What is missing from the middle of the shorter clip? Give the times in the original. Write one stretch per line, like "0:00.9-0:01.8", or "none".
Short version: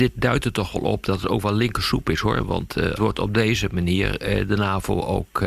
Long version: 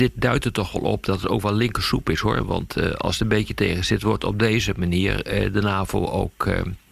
0:02.9-0:04.0